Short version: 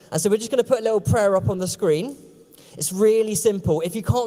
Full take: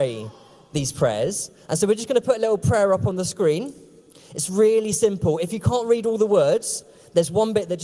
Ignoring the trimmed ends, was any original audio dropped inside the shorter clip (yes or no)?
no